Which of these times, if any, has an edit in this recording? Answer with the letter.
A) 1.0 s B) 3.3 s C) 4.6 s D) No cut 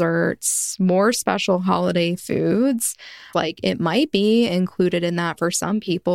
B